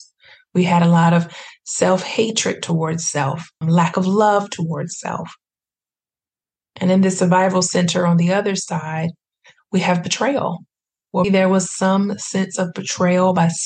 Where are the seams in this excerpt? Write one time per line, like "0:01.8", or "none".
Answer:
0:03.6
0:11.2